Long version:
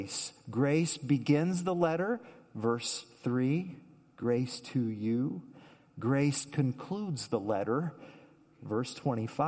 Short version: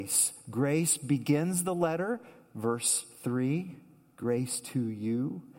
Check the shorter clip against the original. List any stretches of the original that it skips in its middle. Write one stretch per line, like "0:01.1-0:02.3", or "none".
none